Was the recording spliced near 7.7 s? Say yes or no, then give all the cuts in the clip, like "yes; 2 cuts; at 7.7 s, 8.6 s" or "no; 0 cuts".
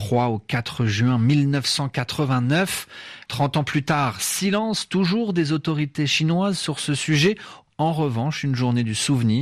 yes; 2 cuts; at 3.3 s, 7.7 s